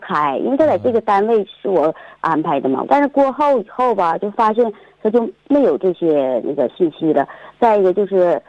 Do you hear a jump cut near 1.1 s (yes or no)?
no